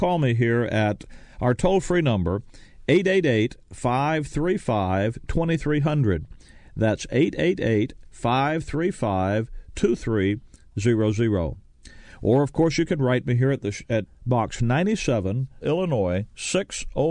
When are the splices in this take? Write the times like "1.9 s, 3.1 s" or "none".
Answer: 14.1 s, 15.6 s